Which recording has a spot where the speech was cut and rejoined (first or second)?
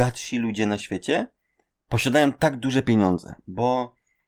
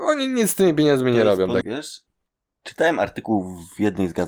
second